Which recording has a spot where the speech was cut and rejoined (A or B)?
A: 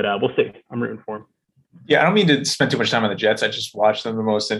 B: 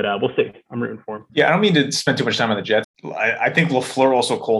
B